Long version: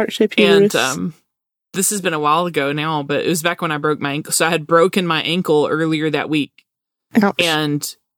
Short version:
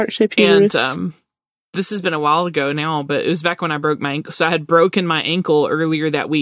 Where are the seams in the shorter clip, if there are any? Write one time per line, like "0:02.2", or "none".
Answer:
none